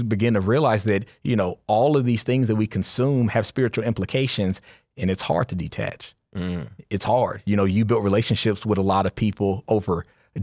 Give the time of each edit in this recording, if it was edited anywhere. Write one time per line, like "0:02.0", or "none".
none